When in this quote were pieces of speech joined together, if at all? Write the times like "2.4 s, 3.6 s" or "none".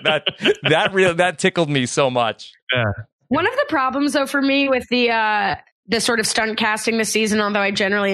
none

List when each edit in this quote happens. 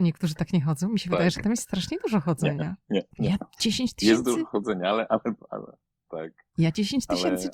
3.1 s

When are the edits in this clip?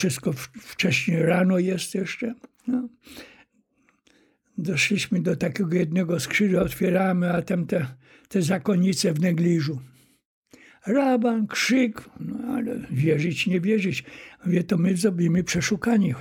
12.2 s

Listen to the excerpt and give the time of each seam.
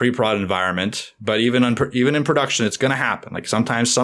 none

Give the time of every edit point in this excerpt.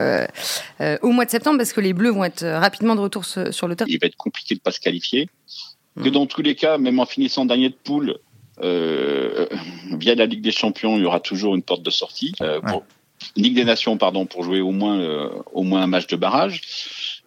3.9 s, 12.4 s

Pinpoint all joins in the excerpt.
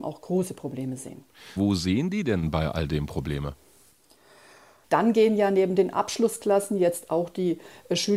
1.6 s, 4.8 s

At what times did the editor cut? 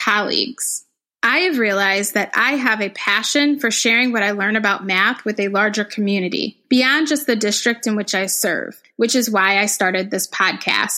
none

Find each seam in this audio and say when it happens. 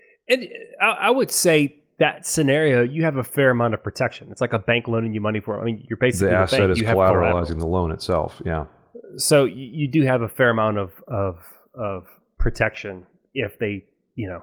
none

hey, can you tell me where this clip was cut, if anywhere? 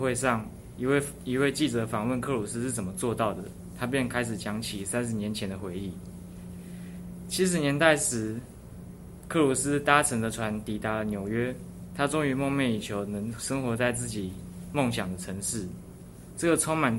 none

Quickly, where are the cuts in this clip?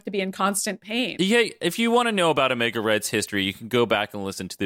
none

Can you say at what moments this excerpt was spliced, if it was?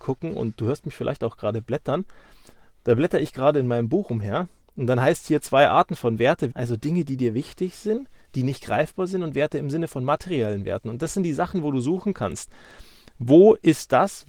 6.5 s

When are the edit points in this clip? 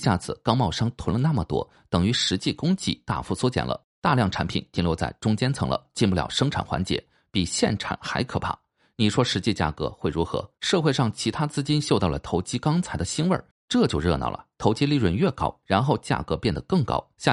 10.6 s, 13.5 s, 15.6 s

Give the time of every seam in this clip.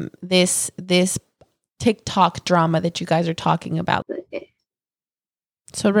4.0 s

